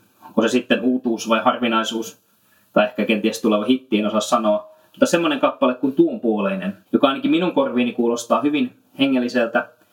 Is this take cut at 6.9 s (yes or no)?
yes